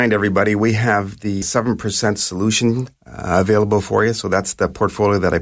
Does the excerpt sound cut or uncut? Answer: cut